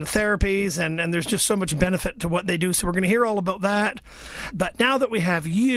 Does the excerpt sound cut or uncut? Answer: cut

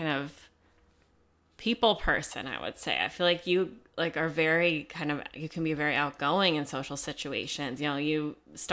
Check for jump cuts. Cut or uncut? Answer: uncut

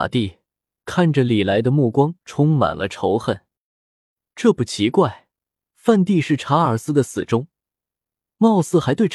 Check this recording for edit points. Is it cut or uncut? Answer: uncut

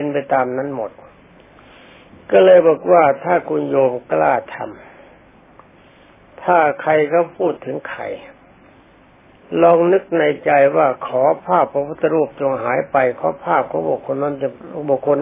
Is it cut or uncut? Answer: uncut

